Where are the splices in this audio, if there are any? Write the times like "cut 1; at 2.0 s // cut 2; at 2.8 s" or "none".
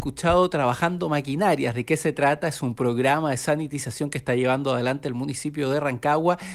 none